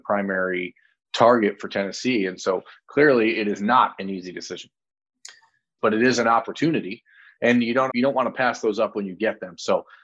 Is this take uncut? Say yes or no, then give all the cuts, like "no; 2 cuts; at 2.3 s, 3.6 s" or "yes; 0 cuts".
no; 2 cuts; at 5.8 s, 7.9 s